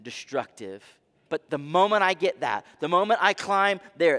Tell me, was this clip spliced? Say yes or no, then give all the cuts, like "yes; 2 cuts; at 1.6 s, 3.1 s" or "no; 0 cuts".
yes; 2 cuts; at 1.3 s, 2.8 s